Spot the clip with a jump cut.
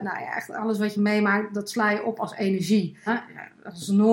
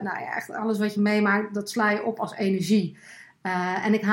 first; 1 cut; at 3.1 s

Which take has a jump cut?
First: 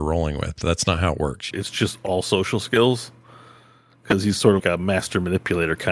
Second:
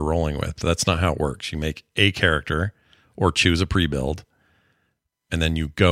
first; 2 cuts; at 1.5 s, 4.6 s

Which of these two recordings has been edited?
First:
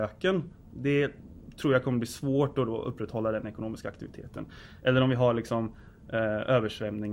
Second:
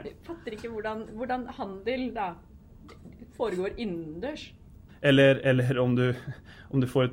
second; 1 cut; at 4.9 s

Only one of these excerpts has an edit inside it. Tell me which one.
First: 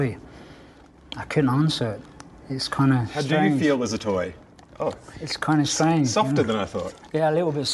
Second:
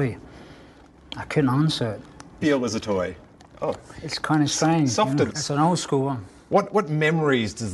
second; 2 cuts; at 2.4 s, 5.3 s

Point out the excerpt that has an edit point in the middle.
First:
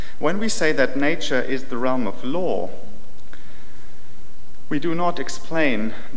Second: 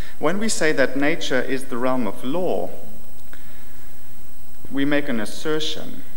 second; 1 cut; at 4.6 s

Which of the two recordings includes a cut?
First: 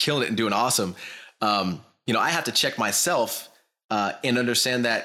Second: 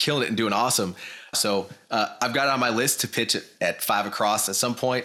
second; 1 cut; at 1.3 s

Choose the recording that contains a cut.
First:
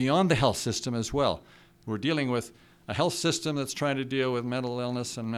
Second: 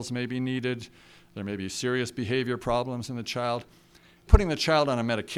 second; 1 cut; at 4.3 s

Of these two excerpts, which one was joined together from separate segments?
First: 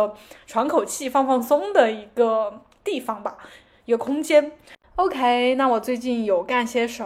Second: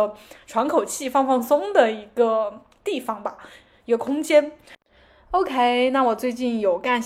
first; 1 cut; at 4.8 s

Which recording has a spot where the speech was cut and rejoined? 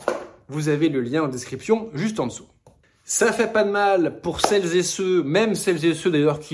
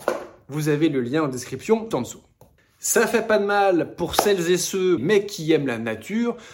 second; 2 cuts; at 1.9 s, 5.0 s

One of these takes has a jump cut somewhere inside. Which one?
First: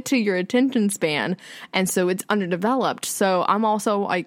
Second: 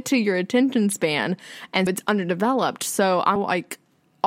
second; 2 cuts; at 1.9 s, 3.4 s

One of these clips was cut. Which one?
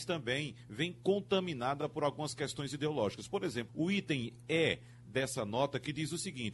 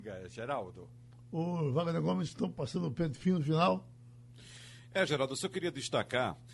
first; 1 cut; at 3.7 s

